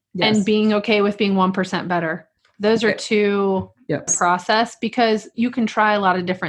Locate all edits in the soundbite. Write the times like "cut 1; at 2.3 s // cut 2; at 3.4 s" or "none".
cut 1; at 4.1 s